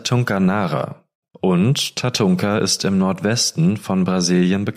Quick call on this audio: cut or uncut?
cut